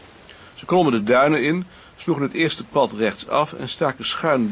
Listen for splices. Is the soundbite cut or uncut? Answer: uncut